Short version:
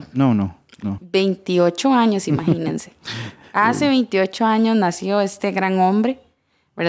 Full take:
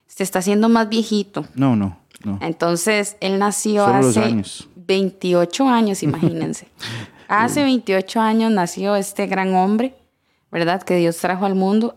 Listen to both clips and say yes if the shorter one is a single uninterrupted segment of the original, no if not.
no